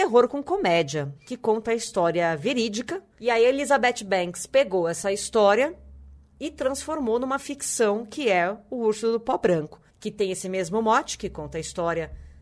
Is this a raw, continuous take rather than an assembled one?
no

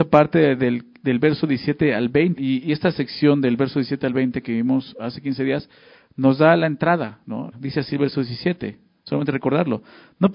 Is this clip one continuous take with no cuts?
no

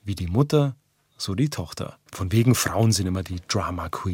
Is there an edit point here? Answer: yes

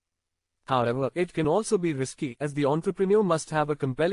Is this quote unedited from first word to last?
yes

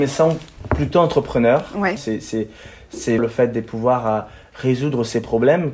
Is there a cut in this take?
yes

